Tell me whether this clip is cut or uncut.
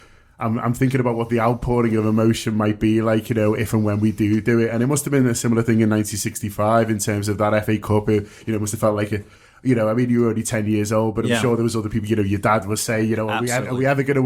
uncut